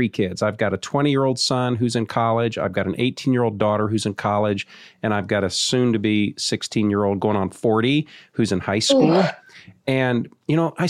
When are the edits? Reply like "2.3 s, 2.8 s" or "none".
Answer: none